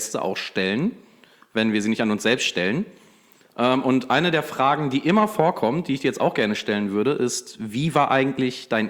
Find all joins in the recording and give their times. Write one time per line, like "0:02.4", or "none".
none